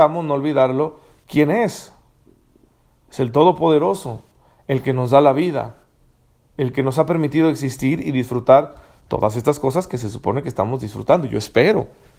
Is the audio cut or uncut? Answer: uncut